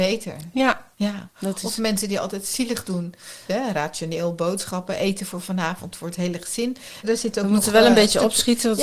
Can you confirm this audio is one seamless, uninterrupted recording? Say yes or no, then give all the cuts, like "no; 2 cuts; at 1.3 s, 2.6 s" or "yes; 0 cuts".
no; 3 cuts; at 0.9 s, 3.5 s, 7.0 s